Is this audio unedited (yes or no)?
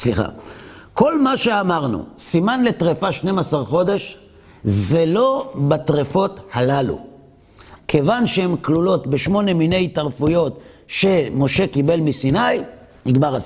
no